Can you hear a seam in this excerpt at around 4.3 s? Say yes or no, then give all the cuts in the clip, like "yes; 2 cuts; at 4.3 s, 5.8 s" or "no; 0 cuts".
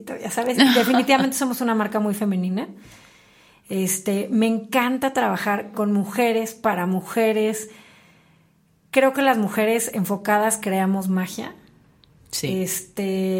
no; 0 cuts